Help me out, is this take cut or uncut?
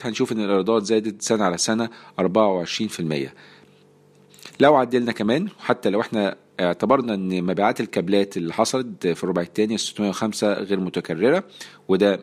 uncut